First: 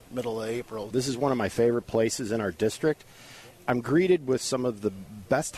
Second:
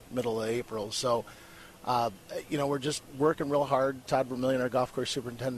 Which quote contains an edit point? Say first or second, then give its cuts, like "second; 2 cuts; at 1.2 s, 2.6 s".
first; 2 cuts; at 0.9 s, 3.5 s